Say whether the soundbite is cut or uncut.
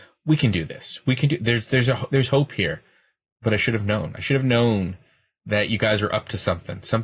uncut